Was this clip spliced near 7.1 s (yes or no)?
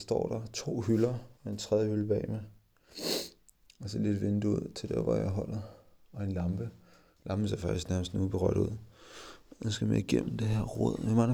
no